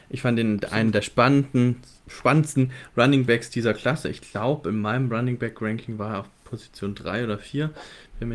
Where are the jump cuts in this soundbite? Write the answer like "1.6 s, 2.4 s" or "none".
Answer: none